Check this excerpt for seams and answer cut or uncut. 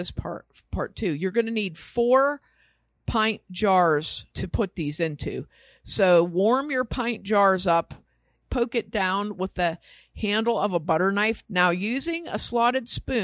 cut